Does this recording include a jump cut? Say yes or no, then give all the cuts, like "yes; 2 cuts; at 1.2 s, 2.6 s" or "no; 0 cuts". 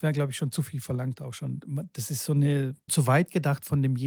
yes; 1 cut; at 2.9 s